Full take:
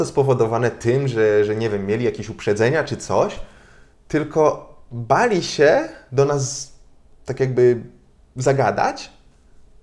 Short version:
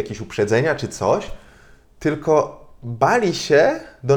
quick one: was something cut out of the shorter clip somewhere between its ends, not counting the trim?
no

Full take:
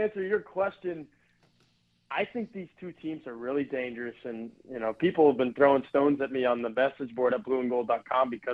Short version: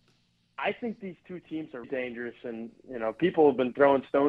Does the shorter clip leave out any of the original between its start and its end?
yes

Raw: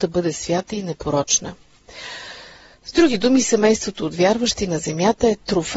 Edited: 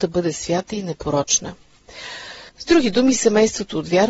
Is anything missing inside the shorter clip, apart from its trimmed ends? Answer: yes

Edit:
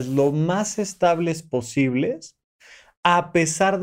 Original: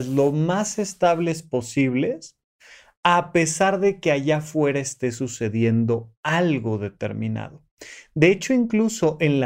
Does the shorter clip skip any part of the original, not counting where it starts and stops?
no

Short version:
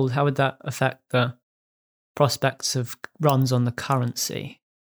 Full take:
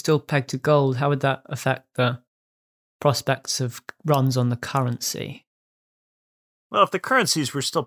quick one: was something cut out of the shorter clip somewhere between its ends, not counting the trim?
no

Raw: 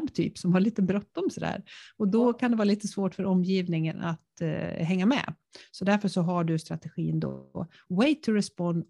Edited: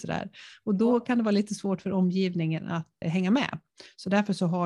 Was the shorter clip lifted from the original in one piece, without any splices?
no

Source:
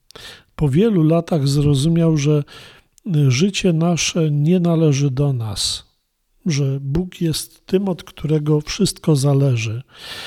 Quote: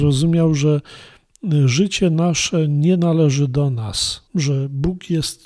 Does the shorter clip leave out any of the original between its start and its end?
yes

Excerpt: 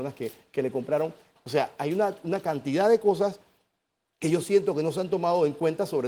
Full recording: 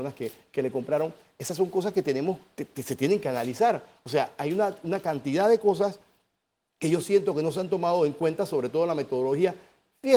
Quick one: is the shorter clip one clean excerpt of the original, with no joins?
no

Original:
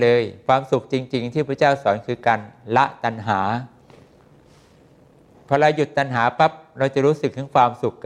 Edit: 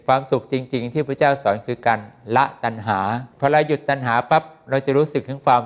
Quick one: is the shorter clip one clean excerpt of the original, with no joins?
no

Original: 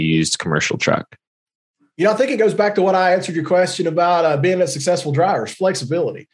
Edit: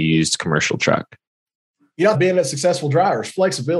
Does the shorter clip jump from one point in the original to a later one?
yes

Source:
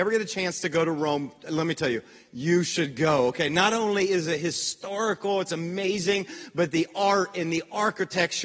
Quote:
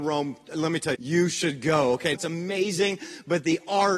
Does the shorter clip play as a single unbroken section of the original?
no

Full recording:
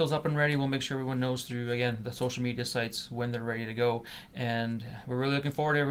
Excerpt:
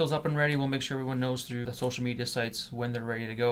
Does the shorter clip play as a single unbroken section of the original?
no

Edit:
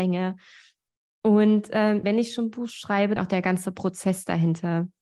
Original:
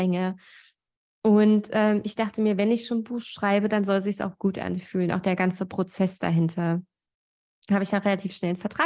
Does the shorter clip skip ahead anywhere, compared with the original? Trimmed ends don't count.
yes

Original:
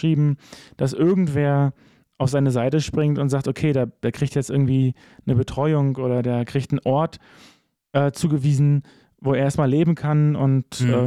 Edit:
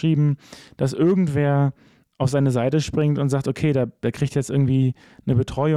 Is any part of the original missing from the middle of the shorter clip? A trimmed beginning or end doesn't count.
no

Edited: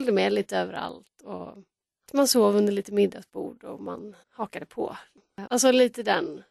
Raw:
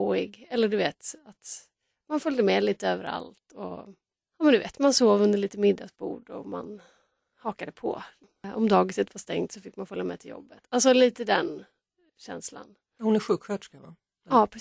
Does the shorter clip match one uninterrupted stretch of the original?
no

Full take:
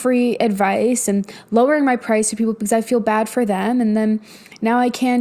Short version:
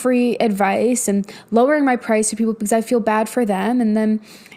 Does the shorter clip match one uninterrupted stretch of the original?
yes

